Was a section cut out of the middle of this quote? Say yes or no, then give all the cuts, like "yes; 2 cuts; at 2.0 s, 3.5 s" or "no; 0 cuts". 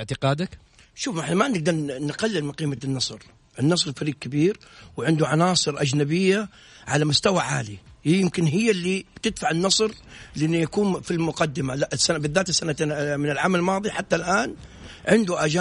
no; 0 cuts